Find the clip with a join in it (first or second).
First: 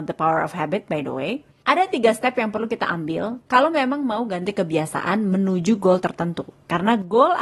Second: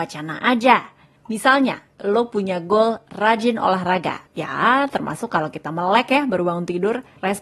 second